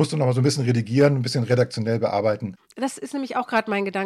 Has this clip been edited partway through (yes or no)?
no